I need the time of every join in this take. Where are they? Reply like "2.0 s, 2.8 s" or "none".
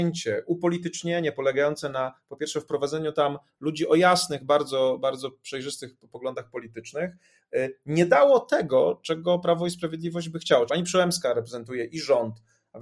10.7 s